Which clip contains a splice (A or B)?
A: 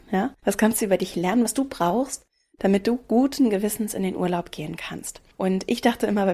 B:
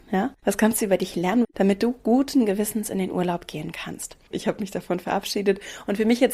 B